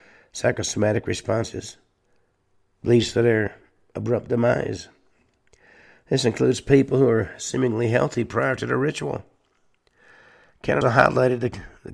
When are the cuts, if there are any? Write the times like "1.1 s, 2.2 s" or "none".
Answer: 10.8 s

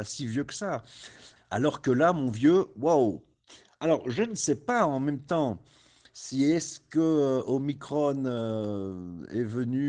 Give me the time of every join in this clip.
1.4 s

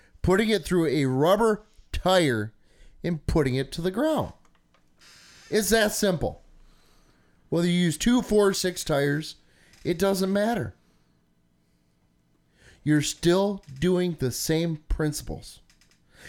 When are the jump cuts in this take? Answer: none

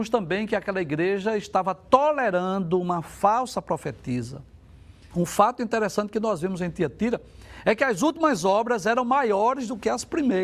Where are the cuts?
5.1 s

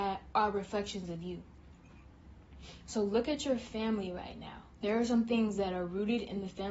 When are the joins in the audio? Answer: 4.8 s

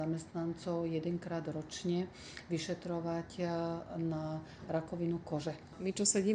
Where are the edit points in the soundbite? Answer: none

